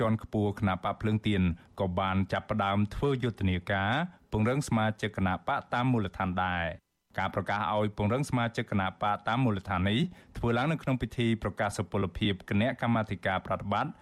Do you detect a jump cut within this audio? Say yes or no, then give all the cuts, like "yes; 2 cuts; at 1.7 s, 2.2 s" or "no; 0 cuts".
no; 0 cuts